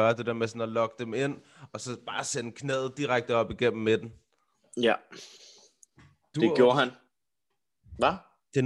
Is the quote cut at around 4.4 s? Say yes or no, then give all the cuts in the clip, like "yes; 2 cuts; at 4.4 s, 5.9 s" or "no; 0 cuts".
no; 1 cut; at 6.3 s